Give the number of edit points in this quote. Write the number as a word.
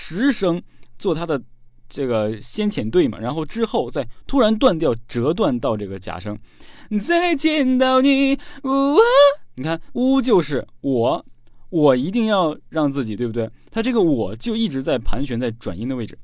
one